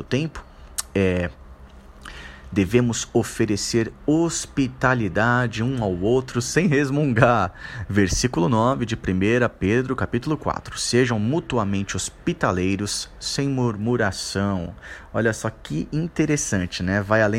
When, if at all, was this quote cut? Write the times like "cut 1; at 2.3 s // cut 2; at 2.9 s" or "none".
none

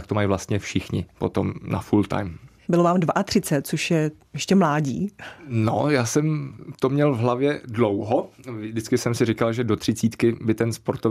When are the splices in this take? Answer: cut 1; at 2.6 s

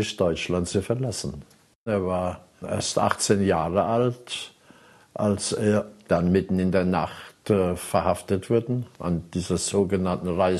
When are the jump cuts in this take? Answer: cut 1; at 1.7 s

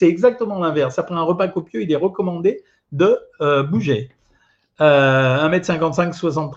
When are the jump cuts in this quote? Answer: none

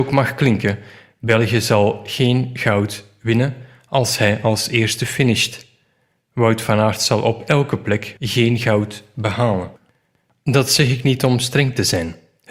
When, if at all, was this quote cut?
cut 1; at 8.2 s

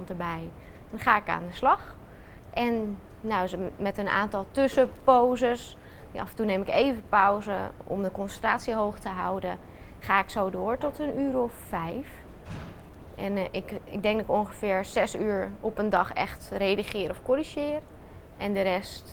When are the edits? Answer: cut 1; at 11.6 s

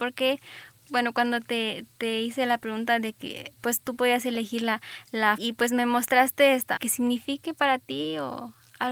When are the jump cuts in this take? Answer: cut 1; at 5.4 s // cut 2; at 6.8 s

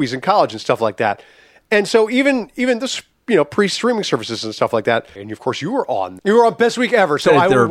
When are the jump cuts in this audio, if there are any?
cut 1; at 5.2 s // cut 2; at 6.2 s

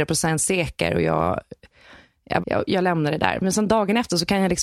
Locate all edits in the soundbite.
cut 1; at 2.4 s

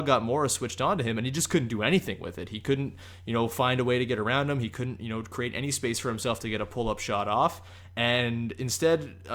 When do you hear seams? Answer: none

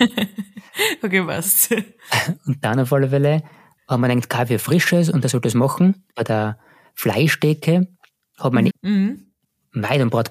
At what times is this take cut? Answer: cut 1; at 6.1 s // cut 2; at 8.7 s

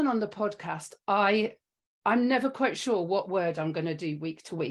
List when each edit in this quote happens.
none

